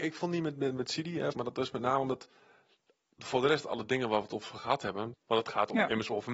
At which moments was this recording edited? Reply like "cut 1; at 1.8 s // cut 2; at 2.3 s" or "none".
cut 1; at 1.3 s // cut 2; at 5.1 s